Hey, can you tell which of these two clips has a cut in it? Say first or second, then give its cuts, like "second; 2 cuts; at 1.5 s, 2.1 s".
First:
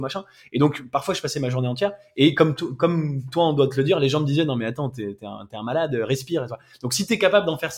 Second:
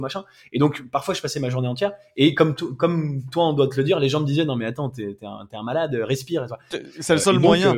second; 1 cut; at 6.7 s